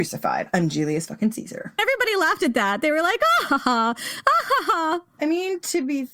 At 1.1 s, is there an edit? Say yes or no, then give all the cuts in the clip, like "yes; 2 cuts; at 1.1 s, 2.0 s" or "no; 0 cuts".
no; 2 cuts; at 3.5 s, 5.2 s